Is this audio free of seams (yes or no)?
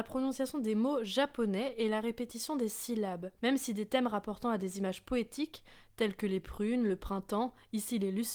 no